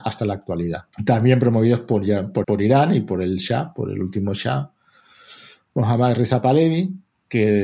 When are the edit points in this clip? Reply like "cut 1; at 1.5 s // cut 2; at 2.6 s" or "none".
cut 1; at 0.9 s // cut 2; at 2.4 s